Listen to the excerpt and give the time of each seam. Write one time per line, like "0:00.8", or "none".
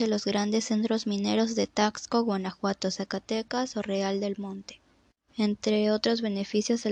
0:05.3